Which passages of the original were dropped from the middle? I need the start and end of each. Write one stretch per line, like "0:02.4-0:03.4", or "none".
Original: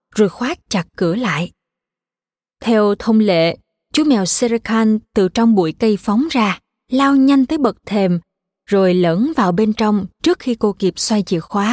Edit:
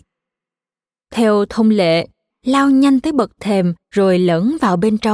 0:03.8-0:06.8
0:08.3-0:08.6